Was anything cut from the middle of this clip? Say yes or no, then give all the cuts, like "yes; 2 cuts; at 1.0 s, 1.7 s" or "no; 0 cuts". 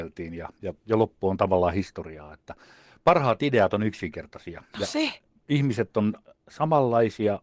no; 0 cuts